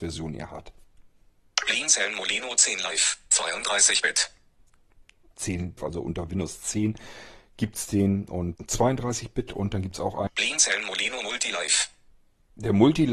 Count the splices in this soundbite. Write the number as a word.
three